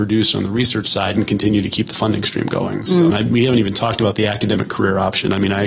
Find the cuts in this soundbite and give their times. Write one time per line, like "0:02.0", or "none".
0:03.1